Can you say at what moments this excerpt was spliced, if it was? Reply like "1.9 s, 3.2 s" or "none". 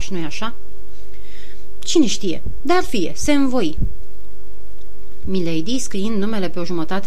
none